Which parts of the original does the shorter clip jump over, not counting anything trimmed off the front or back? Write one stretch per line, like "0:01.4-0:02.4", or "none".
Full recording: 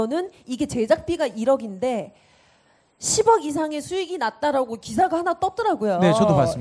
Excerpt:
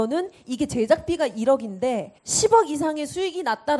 0:02.2-0:02.9